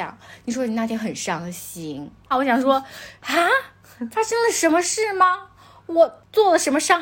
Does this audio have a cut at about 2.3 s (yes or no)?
yes